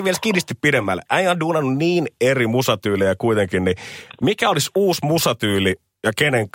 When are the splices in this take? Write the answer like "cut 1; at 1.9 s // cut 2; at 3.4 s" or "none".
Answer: none